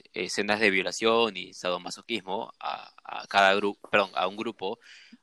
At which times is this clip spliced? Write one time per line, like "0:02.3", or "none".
none